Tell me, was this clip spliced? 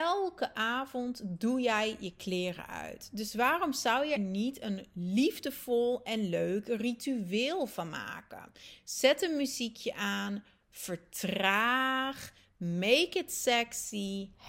yes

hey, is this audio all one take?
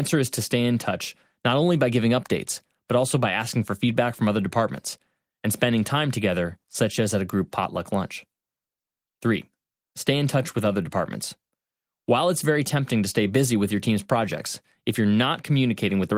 no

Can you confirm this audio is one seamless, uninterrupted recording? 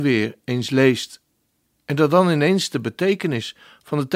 yes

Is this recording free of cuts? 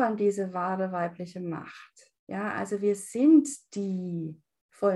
no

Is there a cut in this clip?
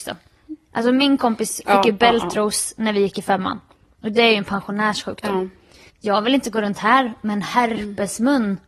yes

